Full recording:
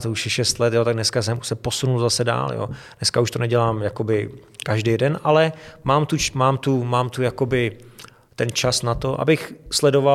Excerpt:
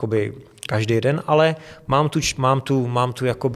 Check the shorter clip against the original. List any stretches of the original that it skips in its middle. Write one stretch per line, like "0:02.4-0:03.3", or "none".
none